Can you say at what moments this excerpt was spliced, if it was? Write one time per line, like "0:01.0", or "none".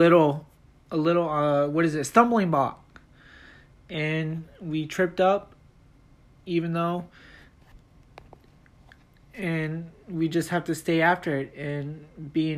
none